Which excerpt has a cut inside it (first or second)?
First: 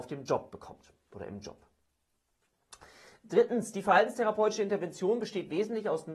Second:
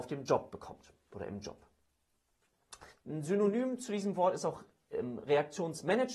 second